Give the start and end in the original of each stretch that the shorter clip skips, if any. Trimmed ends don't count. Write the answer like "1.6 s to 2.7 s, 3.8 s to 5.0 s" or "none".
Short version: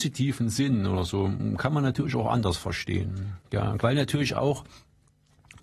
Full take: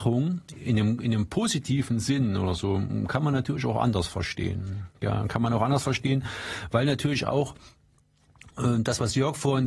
5.3 s to 6.7 s